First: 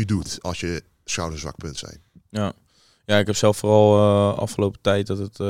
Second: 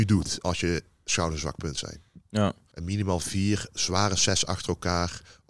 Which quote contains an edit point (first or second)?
second